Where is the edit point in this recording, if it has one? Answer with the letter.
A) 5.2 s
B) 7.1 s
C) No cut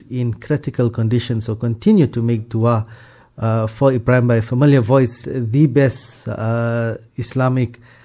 A